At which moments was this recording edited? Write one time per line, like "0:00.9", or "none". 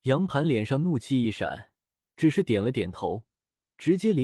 0:02.0